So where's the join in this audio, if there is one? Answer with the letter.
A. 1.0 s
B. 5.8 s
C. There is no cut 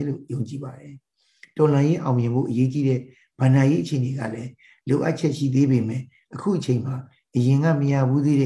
C